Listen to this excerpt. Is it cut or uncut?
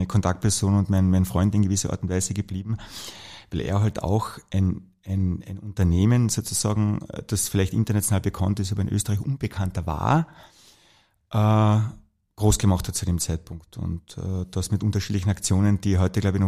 uncut